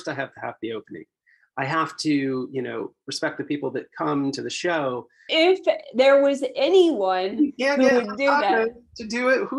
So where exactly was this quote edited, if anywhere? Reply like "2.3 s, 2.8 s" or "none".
5.3 s